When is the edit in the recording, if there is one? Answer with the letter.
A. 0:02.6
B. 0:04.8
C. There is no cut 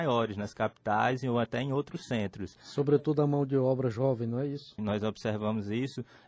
B